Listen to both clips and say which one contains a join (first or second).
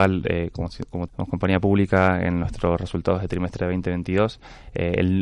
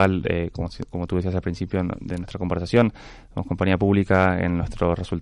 first